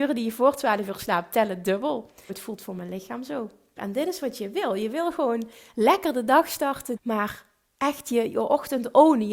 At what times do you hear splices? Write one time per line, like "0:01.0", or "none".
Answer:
0:02.3
0:03.8
0:07.0